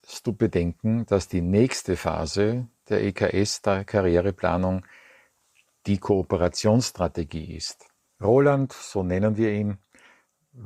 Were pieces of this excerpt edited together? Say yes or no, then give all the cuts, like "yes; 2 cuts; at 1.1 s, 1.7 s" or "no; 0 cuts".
yes; 1 cut; at 8.1 s